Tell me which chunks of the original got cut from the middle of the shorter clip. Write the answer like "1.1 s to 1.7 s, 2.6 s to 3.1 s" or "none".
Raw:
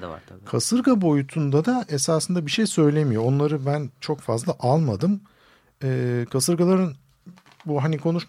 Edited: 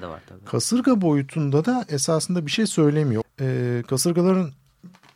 3.2 s to 5.6 s